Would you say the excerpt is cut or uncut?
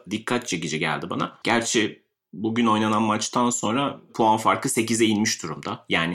cut